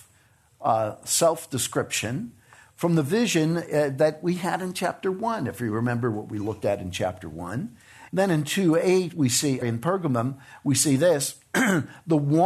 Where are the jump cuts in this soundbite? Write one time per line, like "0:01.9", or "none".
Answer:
0:08.1
0:09.6